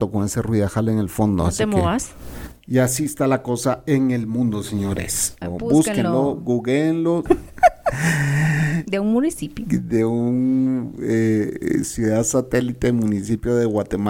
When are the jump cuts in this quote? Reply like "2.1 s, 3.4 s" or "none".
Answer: 5.4 s, 7.3 s